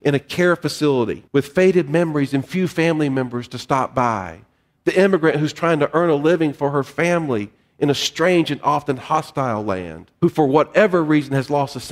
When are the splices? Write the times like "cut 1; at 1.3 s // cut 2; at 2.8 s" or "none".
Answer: cut 1; at 1.3 s // cut 2; at 10.2 s